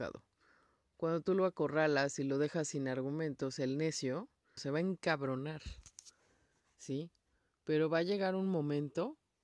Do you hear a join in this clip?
yes; 1 cut; at 4.6 s

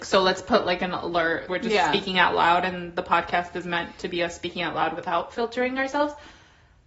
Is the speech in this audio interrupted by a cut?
yes; 1 cut; at 1.5 s

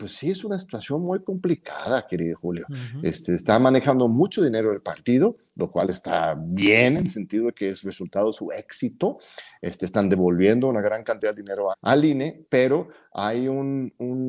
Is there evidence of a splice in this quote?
yes; 1 cut; at 11.7 s

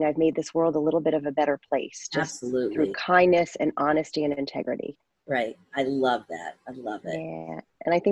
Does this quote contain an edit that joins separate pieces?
no; 0 cuts

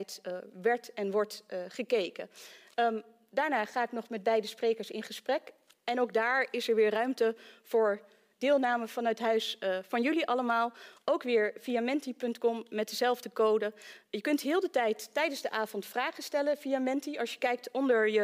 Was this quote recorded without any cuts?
yes; 0 cuts

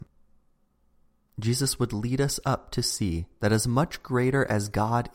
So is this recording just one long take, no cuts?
yes; 0 cuts

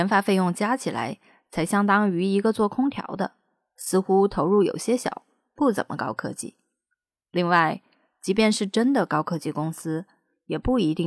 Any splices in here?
no; 0 cuts

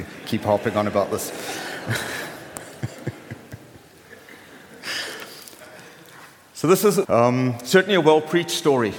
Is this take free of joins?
no; 1 cut; at 7.0 s

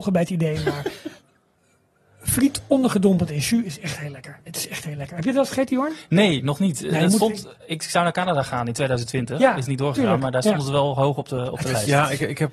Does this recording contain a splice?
yes; 1 cut; at 4.5 s

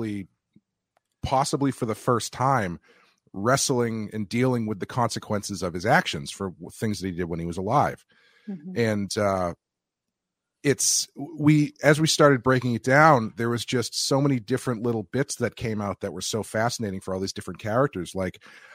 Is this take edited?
no; 0 cuts

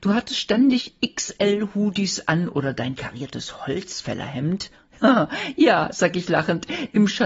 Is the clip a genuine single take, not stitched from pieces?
yes; 0 cuts

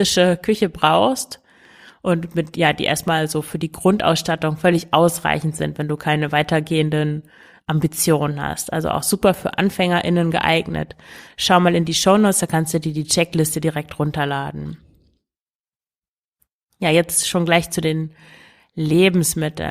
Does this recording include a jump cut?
no; 0 cuts

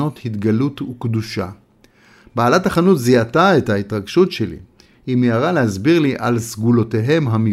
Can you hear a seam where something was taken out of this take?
no; 0 cuts

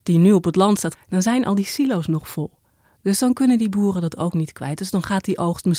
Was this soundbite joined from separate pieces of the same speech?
yes; 1 cut; at 0.9 s

